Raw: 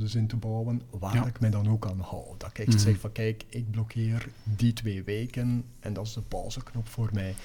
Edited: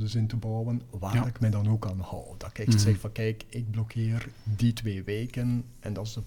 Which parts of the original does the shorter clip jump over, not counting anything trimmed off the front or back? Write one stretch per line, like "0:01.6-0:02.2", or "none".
none